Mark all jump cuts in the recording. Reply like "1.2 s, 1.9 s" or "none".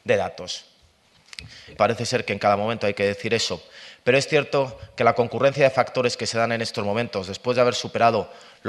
1.8 s